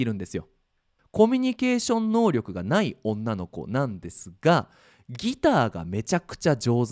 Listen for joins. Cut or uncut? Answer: cut